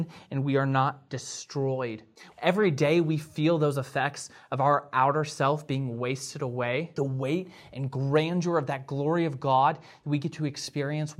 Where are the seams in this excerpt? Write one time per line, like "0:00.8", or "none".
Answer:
0:02.3
0:07.0